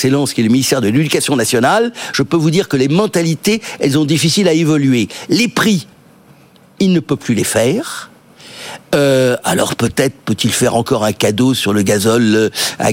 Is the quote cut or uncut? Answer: uncut